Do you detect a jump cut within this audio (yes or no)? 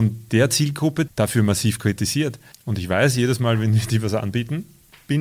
yes